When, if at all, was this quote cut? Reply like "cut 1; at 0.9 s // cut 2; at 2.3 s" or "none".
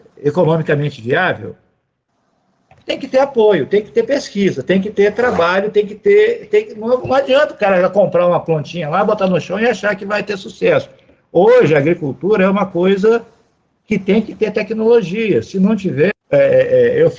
cut 1; at 16.1 s